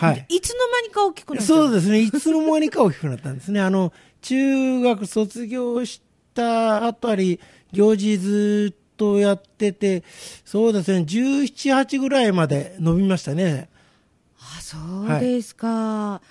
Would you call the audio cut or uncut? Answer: uncut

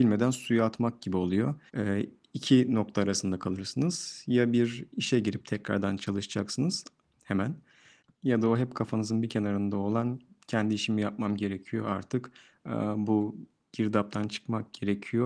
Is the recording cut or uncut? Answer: cut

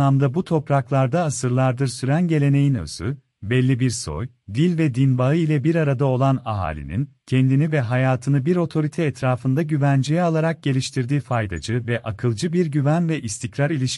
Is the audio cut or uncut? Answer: uncut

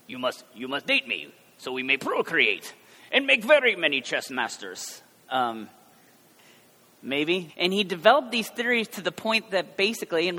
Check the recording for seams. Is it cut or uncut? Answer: cut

